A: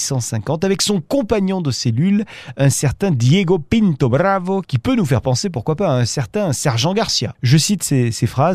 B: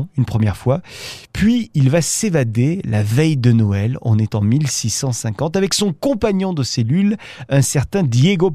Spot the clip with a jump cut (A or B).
A